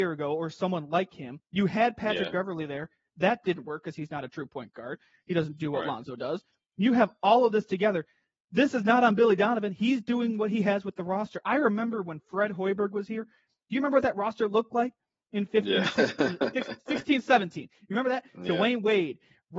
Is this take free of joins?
yes; 0 cuts

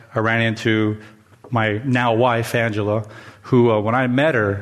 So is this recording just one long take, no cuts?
yes; 0 cuts

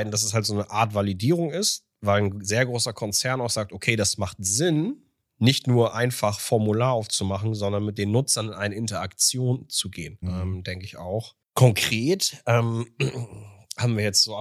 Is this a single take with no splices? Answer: no; 2 cuts; at 10.2 s, 11.4 s

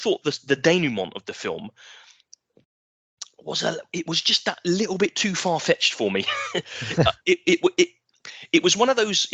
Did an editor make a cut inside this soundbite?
no; 0 cuts

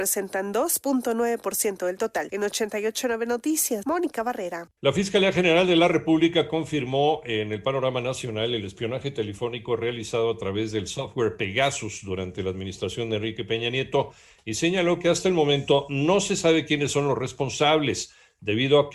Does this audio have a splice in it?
no; 0 cuts

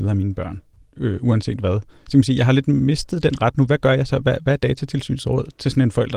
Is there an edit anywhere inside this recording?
no; 0 cuts

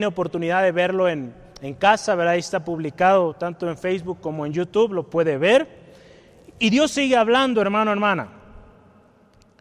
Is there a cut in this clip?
no; 0 cuts

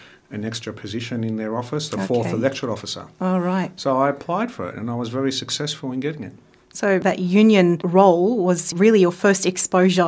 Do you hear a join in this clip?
no; 0 cuts

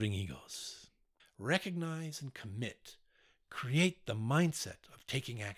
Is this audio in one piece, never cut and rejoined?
no; 1 cut; at 1.2 s

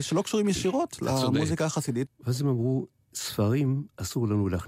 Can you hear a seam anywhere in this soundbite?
yes; 1 cut; at 2.1 s

